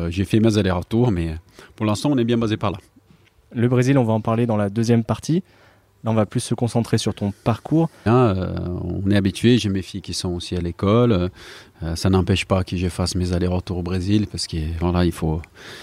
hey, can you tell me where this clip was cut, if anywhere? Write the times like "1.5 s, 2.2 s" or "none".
8.1 s